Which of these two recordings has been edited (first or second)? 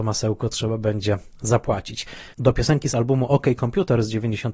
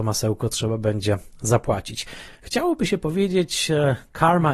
first